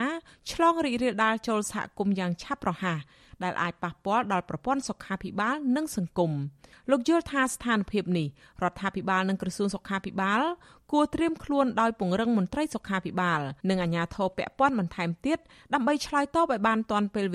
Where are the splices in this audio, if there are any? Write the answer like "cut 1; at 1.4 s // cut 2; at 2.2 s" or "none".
cut 1; at 13.6 s